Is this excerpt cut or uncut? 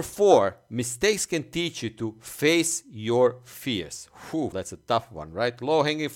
cut